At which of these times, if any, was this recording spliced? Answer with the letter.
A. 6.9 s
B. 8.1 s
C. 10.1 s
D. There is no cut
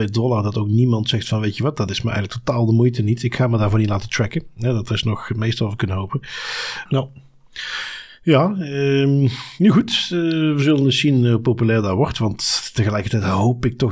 A